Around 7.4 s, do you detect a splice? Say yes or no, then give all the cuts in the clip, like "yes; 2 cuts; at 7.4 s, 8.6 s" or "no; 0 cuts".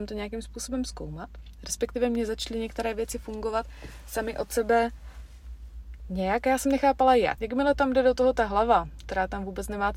yes; 1 cut; at 7.4 s